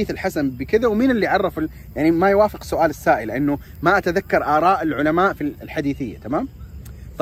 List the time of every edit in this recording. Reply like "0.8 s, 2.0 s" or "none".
none